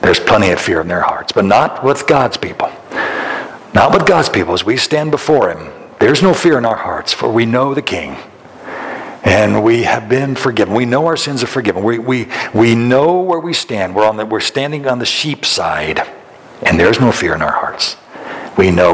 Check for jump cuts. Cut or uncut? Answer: uncut